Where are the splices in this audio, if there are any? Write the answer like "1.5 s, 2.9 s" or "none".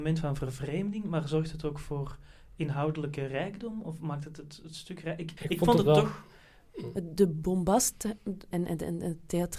5.4 s, 6.9 s, 8.5 s